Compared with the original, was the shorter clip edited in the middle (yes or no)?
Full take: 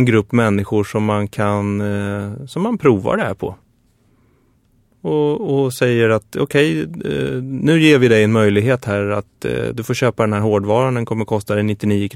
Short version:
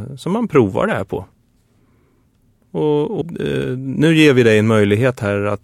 yes